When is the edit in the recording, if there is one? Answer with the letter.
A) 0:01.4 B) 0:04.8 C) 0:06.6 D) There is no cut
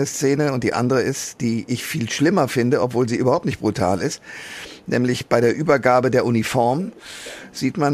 D